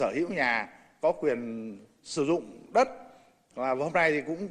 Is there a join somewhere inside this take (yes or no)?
no